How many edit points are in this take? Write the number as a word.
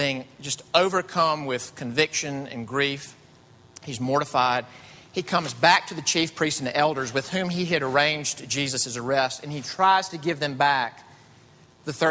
zero